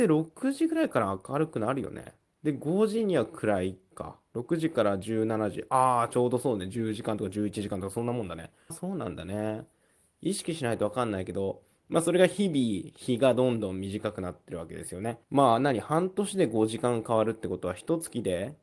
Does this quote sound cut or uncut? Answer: cut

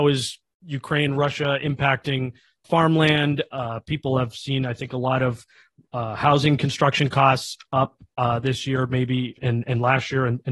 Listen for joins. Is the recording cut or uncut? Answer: uncut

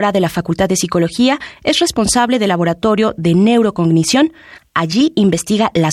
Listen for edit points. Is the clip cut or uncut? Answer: uncut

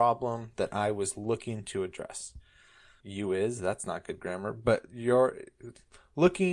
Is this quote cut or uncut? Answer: cut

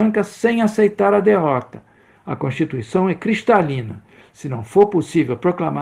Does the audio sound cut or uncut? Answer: cut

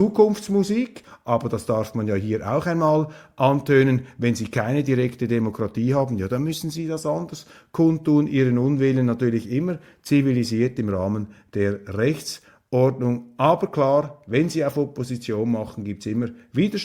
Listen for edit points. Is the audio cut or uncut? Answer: uncut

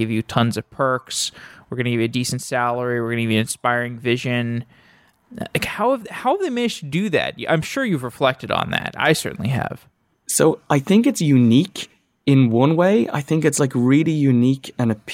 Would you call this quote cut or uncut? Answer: uncut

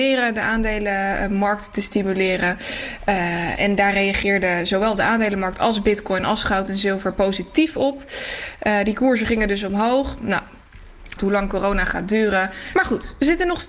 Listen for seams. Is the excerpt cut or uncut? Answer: cut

